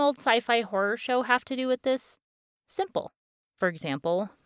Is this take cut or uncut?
cut